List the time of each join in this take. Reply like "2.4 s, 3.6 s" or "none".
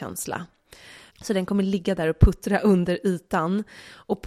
1.1 s